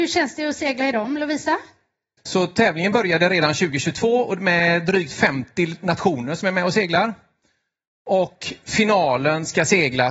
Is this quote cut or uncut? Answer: cut